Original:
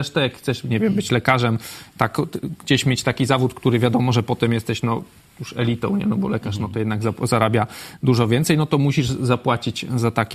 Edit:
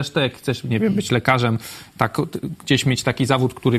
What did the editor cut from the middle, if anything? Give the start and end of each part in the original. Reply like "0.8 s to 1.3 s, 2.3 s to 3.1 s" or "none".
none